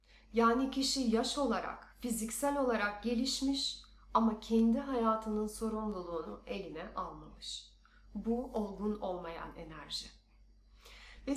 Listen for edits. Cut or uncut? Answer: uncut